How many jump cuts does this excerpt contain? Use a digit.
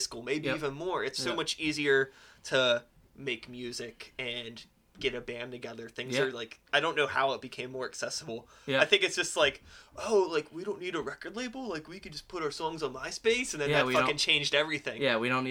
0